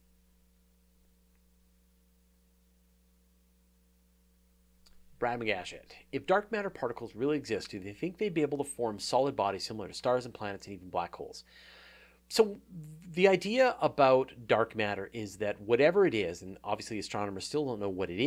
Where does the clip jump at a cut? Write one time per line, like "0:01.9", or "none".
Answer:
none